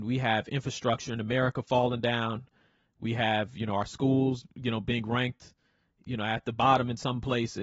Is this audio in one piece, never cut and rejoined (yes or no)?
yes